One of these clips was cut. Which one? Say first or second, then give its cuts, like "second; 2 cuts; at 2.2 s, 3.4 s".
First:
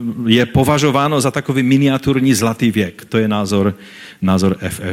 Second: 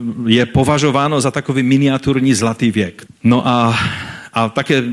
second; 1 cut; at 3.1 s